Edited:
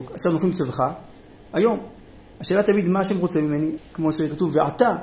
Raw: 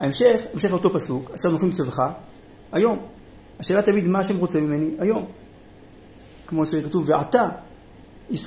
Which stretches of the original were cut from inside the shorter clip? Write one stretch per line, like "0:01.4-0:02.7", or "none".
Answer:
0:05.0-0:06.3